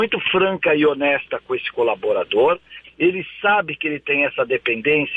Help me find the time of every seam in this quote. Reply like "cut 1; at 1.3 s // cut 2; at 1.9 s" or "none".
cut 1; at 2.8 s